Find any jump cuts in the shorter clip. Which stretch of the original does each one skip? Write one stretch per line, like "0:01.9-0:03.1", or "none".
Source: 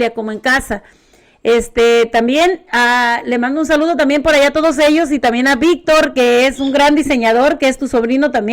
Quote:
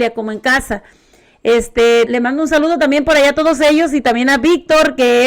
0:02.1-0:03.2